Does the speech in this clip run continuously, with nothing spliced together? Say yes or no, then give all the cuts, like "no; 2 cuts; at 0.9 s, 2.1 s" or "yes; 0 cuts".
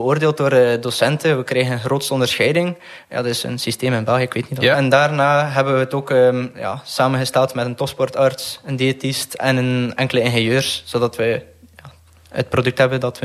no; 1 cut; at 4.7 s